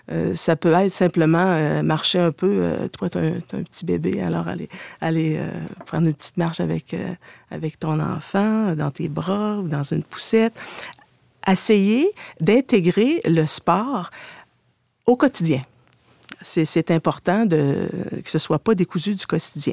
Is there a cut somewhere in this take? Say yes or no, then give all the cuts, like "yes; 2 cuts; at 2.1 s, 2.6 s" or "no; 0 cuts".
no; 0 cuts